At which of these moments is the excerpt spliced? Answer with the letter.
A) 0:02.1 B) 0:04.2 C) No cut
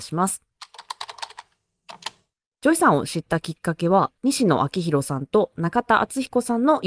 B